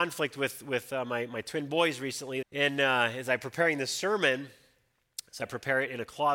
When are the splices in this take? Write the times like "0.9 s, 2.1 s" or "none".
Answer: 2.4 s, 5.4 s